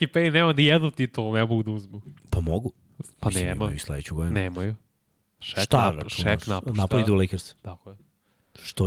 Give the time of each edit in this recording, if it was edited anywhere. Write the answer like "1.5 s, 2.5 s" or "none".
none